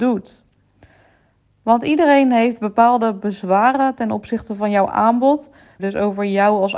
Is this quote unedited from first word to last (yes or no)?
no